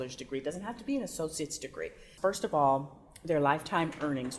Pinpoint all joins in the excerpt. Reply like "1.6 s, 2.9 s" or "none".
2.2 s